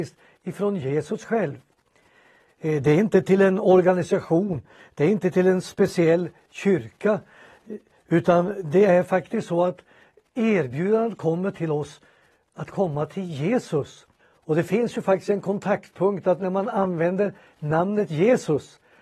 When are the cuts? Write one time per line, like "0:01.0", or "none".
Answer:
0:14.2